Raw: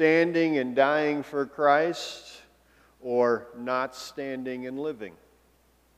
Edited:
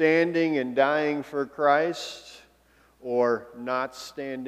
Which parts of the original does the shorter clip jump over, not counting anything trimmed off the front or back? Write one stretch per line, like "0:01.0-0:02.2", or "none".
none